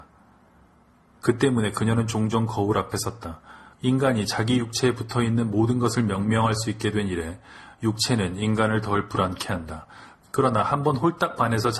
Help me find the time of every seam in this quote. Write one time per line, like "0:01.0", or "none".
0:01.2
0:03.7
0:10.2

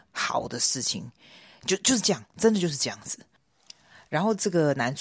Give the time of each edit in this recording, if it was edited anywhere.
none

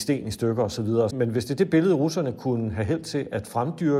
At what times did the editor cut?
0:01.1

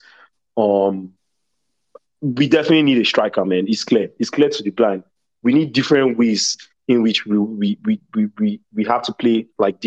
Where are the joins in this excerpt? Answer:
none

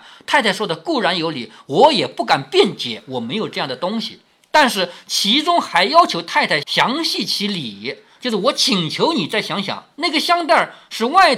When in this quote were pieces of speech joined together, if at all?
0:09.9

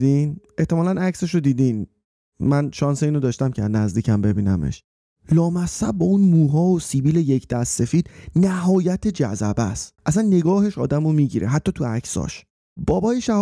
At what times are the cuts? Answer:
0:10.0

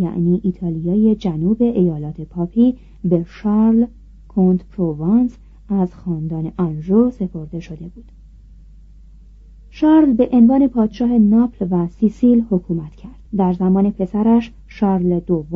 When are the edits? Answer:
0:13.3

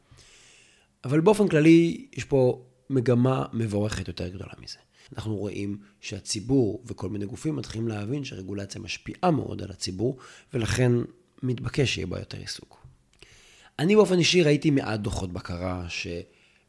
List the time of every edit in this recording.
0:05.1

